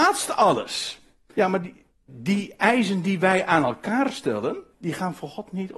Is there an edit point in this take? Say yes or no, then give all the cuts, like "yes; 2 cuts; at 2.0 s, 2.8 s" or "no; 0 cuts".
yes; 2 cuts; at 1.3 s, 4.7 s